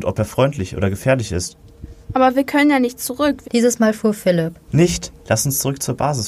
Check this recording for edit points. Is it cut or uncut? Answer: cut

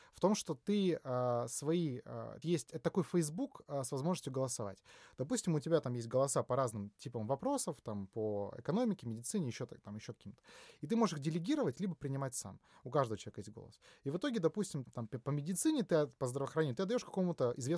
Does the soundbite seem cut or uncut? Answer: cut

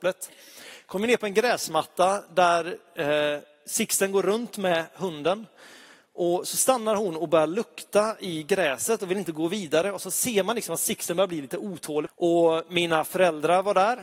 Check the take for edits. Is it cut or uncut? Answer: cut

